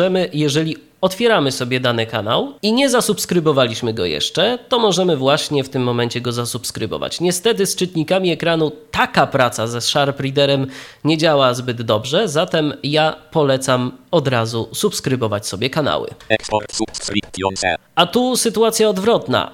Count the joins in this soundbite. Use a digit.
1